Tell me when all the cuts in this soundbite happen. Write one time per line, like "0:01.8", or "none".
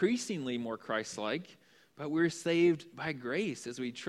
none